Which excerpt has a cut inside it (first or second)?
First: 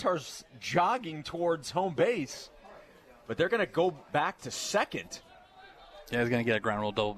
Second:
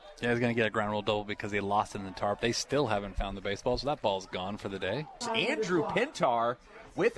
second